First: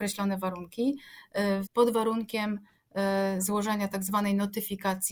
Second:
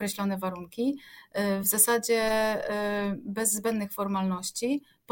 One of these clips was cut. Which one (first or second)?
first